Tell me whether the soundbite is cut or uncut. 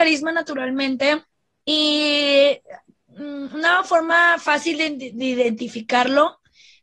cut